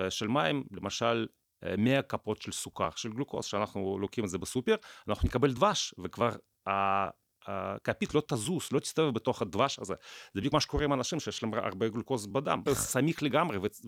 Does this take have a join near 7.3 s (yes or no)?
no